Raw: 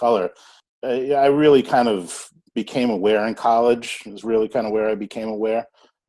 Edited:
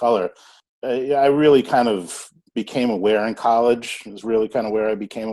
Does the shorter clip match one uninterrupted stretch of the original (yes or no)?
yes